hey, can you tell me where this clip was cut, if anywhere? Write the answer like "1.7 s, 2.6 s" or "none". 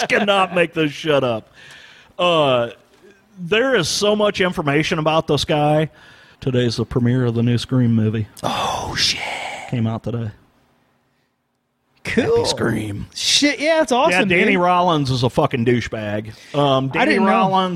6.4 s